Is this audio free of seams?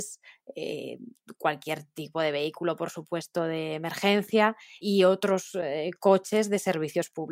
yes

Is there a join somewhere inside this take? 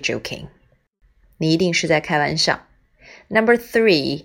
no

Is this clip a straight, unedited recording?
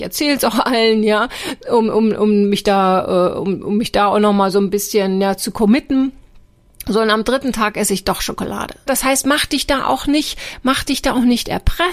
no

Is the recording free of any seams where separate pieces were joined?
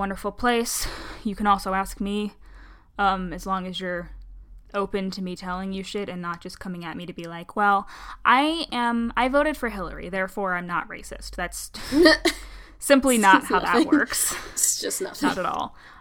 yes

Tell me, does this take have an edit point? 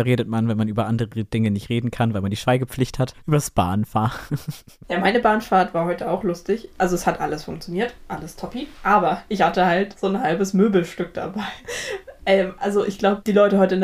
no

